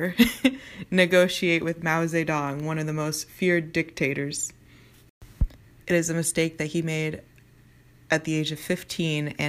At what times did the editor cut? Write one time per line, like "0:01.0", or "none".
0:05.8